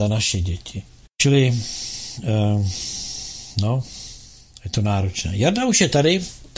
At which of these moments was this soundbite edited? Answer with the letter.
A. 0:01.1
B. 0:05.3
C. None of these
A